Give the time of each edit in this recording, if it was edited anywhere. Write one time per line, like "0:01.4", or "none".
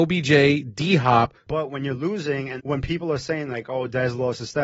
0:01.5
0:02.6